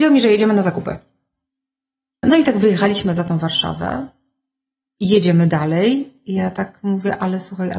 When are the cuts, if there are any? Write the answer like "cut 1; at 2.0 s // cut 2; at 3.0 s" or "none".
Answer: cut 1; at 2.2 s